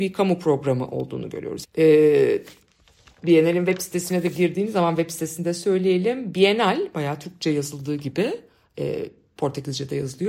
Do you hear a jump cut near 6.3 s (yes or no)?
no